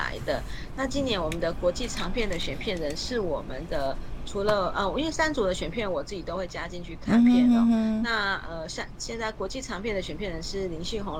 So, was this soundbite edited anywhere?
no; 0 cuts

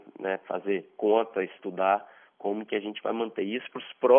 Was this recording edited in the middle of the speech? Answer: no; 0 cuts

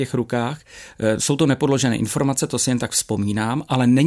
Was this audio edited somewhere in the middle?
no; 0 cuts

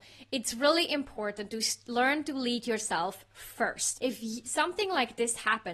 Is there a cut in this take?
yes; 1 cut; at 4.0 s

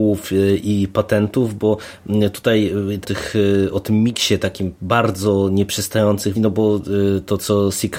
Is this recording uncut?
no; 2 cuts; at 3.0 s, 6.3 s

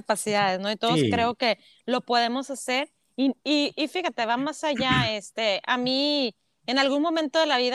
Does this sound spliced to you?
no; 0 cuts

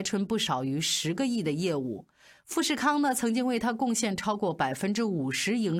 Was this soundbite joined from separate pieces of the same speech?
no; 0 cuts

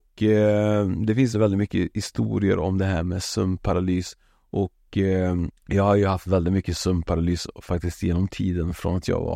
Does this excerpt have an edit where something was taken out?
yes; 2 cuts; at 1.3 s, 5.6 s

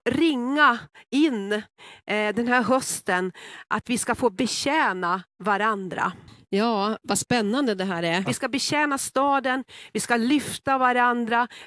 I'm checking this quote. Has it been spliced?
yes; 2 cuts; at 8.3 s, 9.9 s

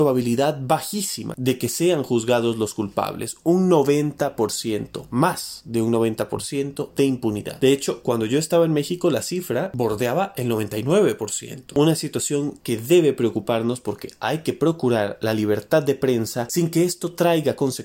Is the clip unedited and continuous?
no; 1 cut; at 16.5 s

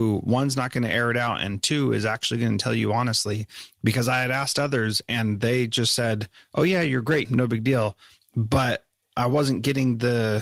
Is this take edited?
yes; 1 cut; at 7.2 s

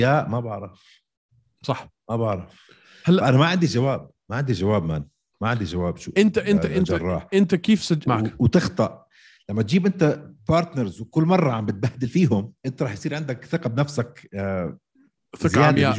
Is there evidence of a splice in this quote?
yes; 2 cuts; at 8.1 s, 12.6 s

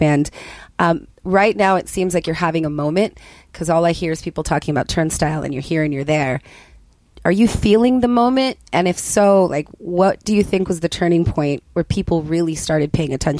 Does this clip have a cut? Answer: no; 0 cuts

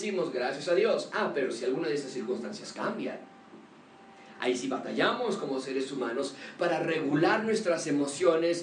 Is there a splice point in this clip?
no; 0 cuts

